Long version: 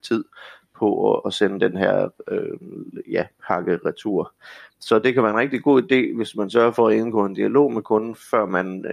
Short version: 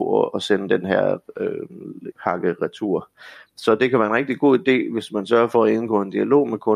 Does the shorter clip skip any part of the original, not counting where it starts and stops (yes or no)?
yes